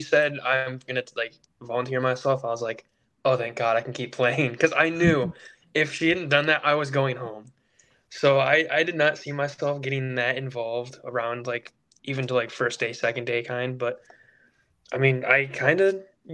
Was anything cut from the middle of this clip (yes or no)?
no